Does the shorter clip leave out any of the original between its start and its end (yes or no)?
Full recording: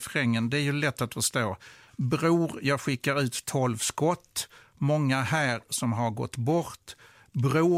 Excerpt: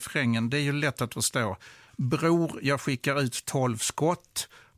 no